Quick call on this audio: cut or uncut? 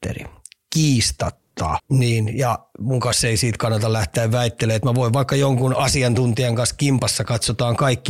cut